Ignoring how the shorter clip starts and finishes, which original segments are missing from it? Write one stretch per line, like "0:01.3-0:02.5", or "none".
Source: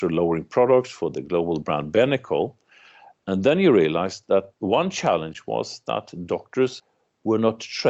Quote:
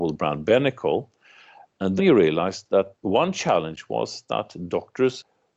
0:03.4-0:03.5